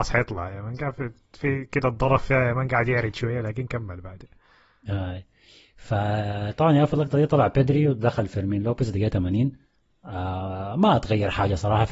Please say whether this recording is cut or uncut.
uncut